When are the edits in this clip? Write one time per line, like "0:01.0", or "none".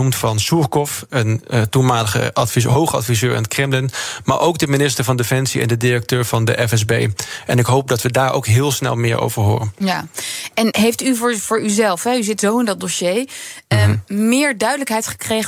0:10.7